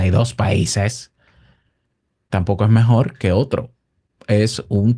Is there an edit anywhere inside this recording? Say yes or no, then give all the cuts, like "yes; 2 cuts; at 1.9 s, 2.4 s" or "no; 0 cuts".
no; 0 cuts